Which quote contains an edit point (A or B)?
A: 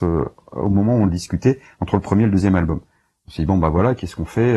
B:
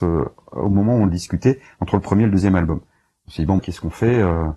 B